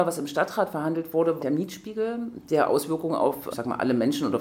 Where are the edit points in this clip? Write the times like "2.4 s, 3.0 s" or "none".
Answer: 1.4 s, 3.5 s